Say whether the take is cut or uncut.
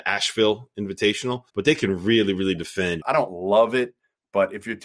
cut